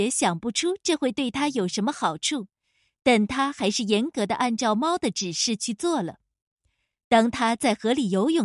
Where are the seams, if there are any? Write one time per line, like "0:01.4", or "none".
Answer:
none